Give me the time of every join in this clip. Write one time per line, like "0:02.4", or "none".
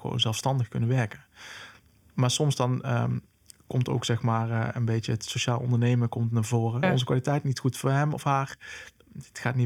0:06.8

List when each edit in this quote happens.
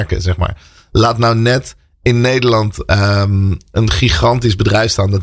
none

